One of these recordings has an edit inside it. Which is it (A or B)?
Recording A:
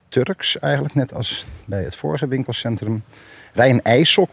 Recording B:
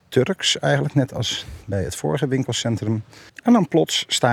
B